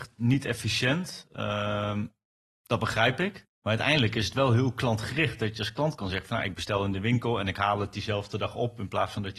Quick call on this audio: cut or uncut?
uncut